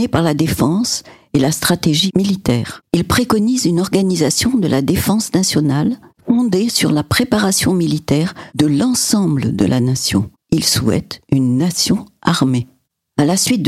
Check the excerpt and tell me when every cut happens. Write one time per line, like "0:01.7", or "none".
none